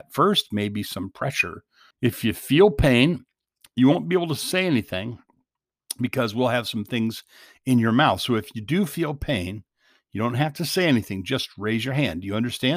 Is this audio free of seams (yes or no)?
no